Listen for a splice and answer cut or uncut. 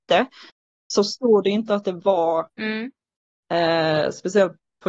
uncut